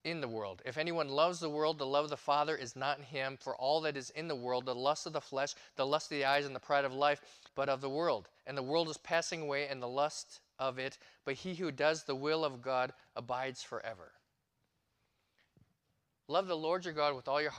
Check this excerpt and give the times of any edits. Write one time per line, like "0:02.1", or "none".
0:07.5